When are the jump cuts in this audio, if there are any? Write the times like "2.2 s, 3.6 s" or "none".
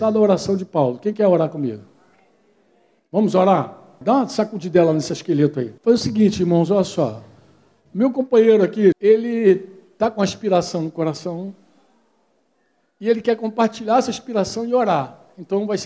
4.0 s, 5.8 s, 8.9 s